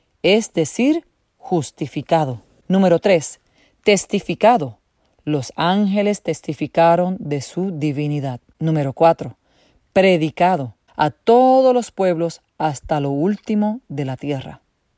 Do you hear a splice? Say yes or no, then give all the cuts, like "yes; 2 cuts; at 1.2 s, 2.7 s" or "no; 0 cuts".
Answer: no; 0 cuts